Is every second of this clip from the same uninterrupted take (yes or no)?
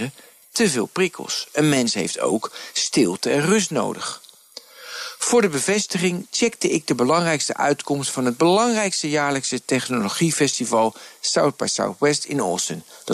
yes